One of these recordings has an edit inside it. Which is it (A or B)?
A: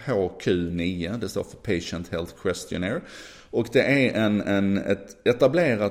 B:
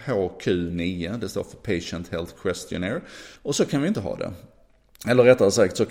B